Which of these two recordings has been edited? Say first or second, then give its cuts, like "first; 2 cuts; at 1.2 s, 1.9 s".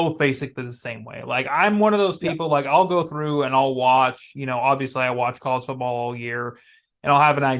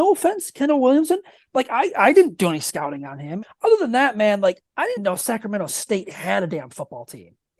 second; 2 cuts; at 3.4 s, 5.0 s